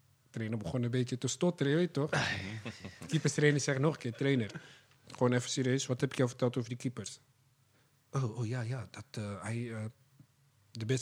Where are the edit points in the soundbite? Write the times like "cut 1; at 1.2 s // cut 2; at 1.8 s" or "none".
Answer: none